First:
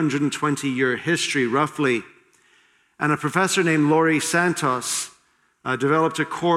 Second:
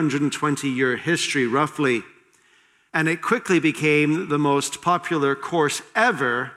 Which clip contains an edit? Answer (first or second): second